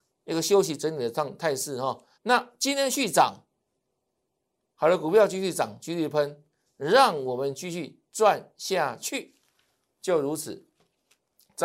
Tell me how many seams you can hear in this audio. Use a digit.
1